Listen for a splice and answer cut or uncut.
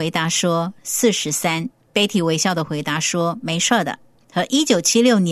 cut